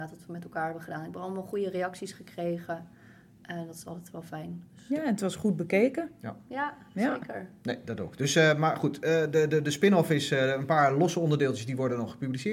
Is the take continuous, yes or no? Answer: yes